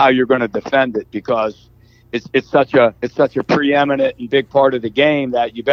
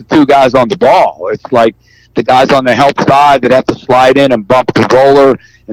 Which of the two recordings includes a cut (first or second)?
first